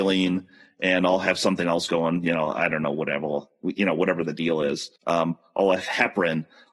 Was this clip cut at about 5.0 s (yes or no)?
yes